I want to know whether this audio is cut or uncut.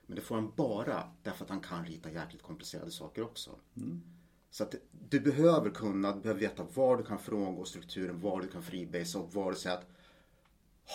cut